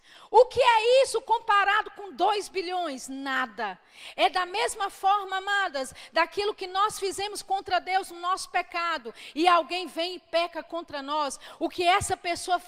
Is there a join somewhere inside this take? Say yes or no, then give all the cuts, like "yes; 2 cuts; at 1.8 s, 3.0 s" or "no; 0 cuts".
no; 0 cuts